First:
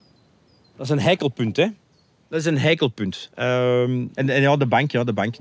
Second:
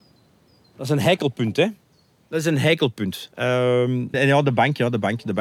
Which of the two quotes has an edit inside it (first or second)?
second